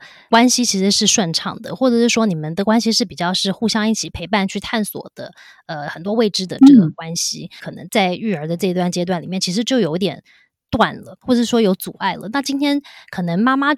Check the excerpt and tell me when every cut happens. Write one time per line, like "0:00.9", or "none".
0:07.6